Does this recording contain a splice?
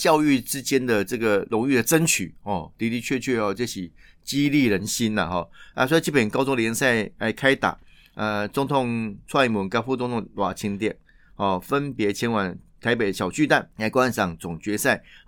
no; 0 cuts

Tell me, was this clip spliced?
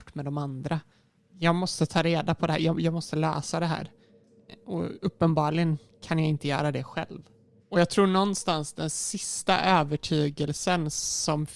yes; 1 cut; at 7.6 s

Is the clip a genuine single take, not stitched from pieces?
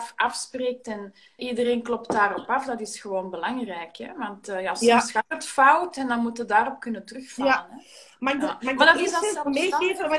no; 1 cut; at 1.4 s

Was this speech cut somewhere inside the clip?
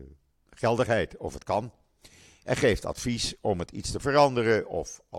no; 0 cuts

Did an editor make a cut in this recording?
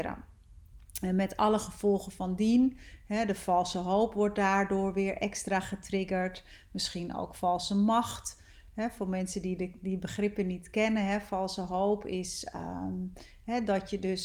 no; 0 cuts

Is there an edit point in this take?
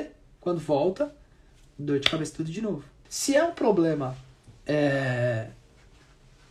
yes; 1 cut; at 3.0 s

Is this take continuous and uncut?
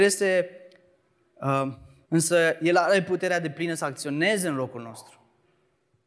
no; 1 cut; at 2.0 s

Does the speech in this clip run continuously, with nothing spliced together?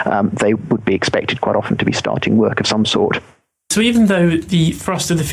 yes; 0 cuts

